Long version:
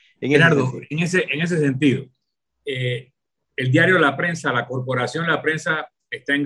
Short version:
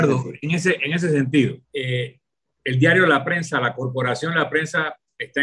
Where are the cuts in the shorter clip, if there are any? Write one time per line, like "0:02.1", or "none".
0:01.6